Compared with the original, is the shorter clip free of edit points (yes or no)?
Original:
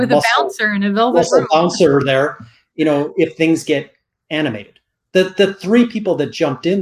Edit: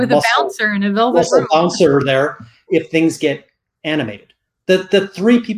no